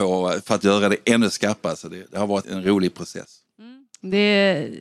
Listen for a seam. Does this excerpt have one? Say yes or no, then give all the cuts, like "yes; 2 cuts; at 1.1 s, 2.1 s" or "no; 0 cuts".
yes; 1 cut; at 2.4 s